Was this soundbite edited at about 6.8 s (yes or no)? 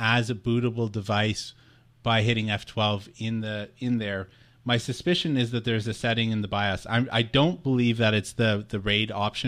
no